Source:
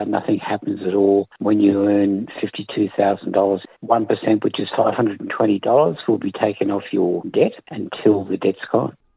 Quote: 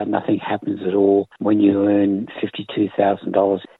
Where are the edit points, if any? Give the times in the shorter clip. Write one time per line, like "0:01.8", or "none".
none